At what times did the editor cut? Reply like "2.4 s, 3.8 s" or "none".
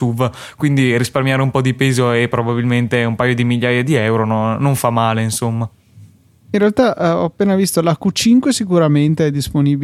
none